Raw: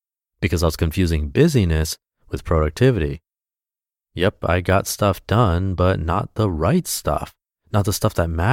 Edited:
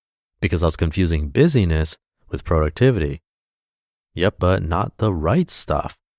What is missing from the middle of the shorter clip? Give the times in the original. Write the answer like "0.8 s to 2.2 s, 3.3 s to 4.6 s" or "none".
4.4 s to 5.8 s